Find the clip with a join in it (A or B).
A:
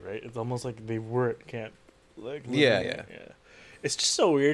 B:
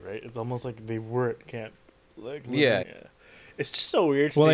B